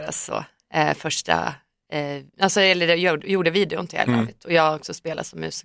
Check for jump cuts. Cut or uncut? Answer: uncut